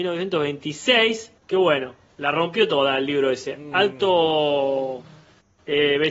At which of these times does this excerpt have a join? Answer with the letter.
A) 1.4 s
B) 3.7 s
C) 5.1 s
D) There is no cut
A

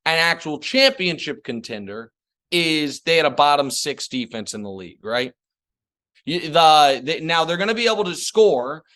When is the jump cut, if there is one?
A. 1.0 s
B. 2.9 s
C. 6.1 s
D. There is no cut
C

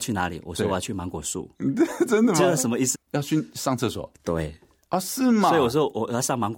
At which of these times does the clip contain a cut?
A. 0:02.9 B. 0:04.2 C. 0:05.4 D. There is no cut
A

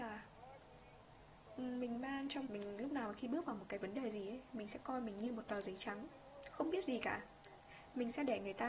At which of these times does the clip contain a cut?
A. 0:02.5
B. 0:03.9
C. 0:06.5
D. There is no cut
A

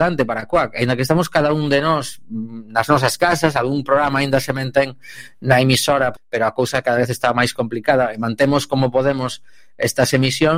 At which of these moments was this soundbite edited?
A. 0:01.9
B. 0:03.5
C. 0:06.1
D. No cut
C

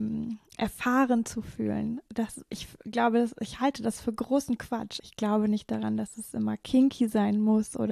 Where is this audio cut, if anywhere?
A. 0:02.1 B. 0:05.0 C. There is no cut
B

